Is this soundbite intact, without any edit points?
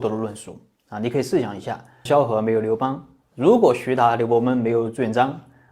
no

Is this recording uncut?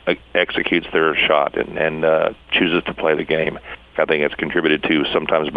no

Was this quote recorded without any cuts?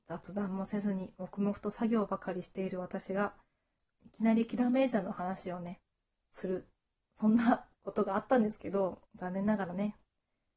no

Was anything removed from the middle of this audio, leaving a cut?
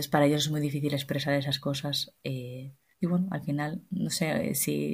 no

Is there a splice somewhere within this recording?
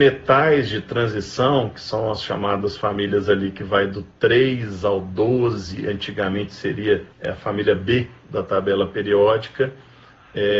yes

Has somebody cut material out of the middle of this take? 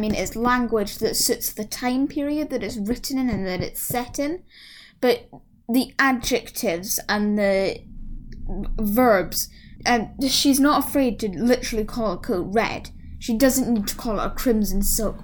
yes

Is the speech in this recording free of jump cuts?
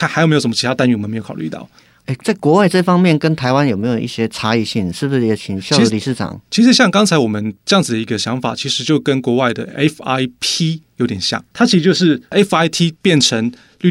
yes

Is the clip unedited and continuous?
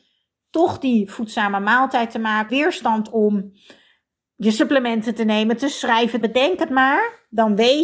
no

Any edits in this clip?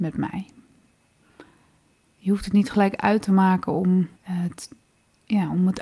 yes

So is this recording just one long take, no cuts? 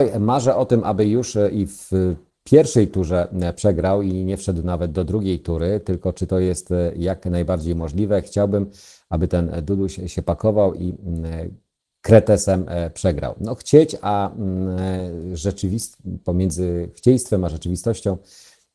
yes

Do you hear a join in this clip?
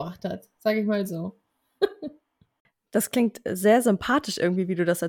no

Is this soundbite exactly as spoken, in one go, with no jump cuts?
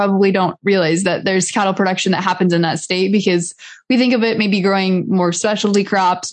yes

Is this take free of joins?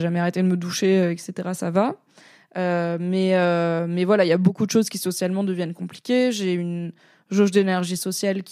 yes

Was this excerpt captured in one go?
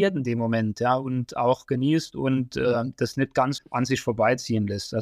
no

